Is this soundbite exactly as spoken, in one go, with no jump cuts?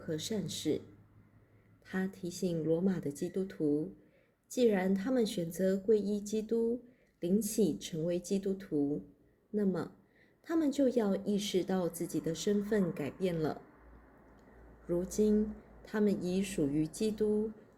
yes; 0 cuts

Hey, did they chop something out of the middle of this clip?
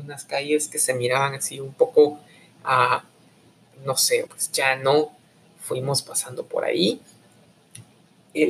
yes; 1 cut; at 4.3 s

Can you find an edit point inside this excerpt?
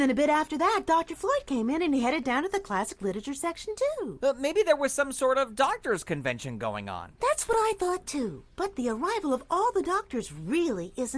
yes; 1 cut; at 4.2 s

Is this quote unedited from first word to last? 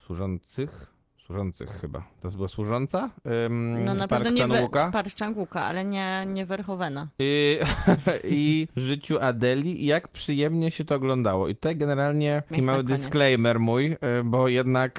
yes; 0 cuts

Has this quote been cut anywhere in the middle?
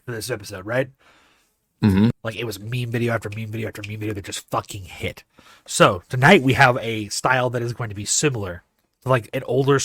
yes; 1 cut; at 2.1 s

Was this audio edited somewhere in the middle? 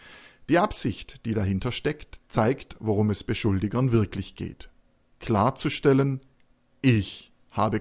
no; 0 cuts

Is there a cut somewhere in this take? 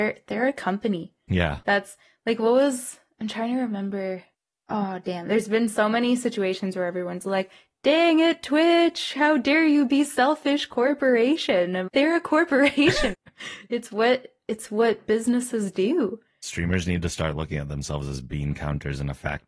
yes; 3 cuts; at 1.6 s, 11.9 s, 13.1 s

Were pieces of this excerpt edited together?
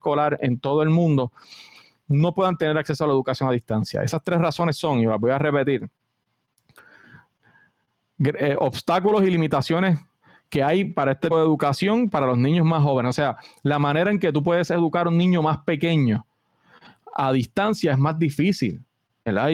yes; 1 cut; at 11.3 s

